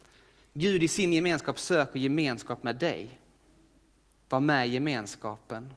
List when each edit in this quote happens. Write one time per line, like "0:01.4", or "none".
0:04.2